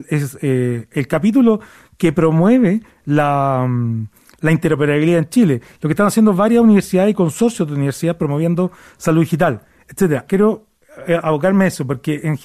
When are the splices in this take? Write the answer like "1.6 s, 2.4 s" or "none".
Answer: 10.3 s